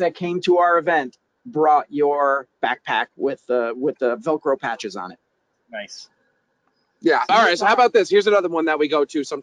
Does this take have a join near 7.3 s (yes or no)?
yes